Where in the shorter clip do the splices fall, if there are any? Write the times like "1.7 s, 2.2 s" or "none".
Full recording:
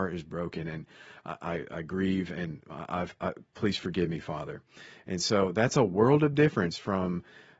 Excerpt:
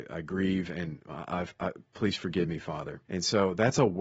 3.1 s